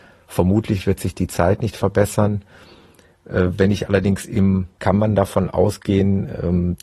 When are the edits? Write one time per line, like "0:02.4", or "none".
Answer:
0:04.8